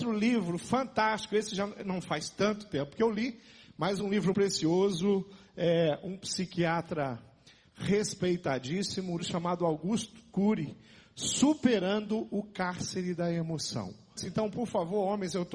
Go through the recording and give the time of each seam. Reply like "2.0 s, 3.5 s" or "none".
4.3 s, 9.2 s, 14.2 s